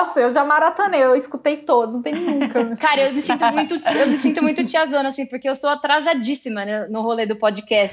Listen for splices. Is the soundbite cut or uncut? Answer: uncut